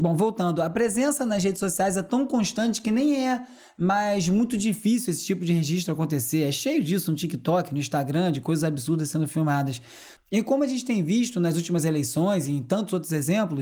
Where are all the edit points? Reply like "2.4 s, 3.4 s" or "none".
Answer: 10.2 s